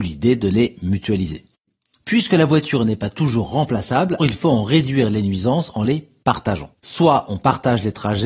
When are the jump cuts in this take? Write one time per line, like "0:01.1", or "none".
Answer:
0:04.2
0:06.8